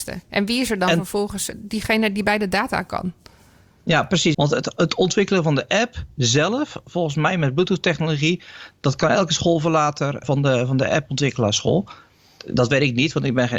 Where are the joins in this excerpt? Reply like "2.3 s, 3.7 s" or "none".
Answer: 1.5 s, 4.3 s, 10.2 s